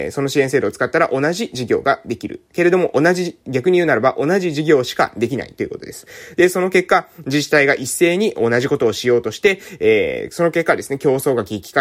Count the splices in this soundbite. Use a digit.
0